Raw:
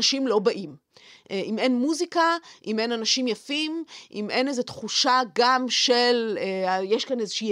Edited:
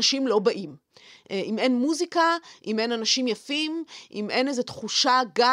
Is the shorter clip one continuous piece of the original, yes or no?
yes